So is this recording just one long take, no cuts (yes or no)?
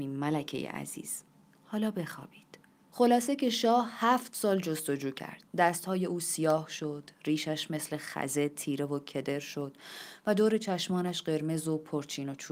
no